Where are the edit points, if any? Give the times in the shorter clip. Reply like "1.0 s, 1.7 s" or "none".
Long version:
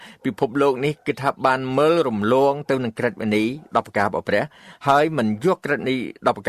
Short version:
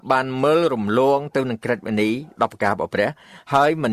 none